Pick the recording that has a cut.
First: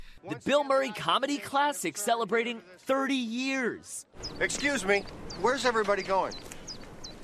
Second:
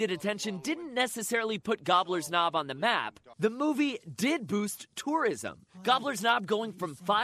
second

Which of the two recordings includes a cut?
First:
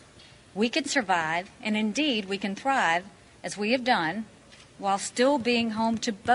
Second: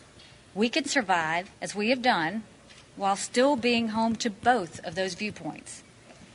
second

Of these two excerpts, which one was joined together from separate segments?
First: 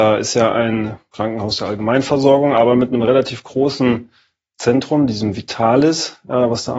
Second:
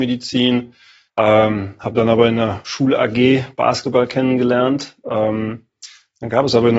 second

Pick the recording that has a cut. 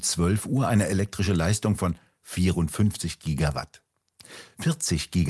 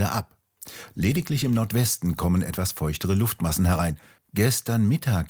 second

